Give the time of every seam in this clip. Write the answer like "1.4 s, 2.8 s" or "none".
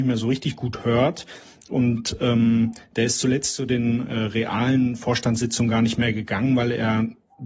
none